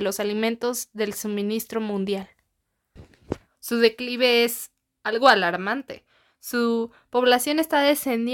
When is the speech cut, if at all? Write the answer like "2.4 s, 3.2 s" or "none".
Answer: 3.5 s